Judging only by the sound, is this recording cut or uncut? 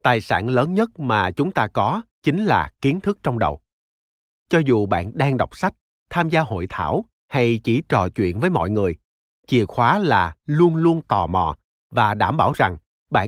uncut